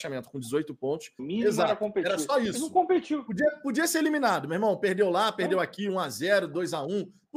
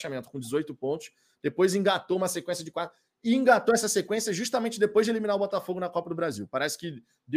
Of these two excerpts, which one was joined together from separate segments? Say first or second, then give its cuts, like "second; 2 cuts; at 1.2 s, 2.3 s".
first; 1 cut; at 1.2 s